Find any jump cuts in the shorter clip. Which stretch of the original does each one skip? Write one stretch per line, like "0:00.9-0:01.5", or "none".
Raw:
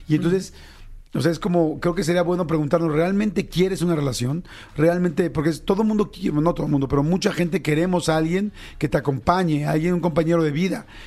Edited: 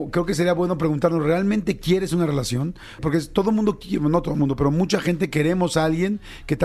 0:04.7-0:05.3